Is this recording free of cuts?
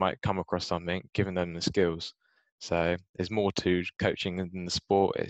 yes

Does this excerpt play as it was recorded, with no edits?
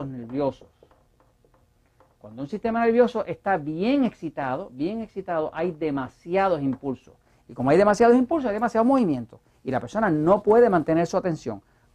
yes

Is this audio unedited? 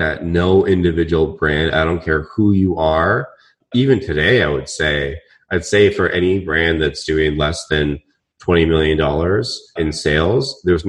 no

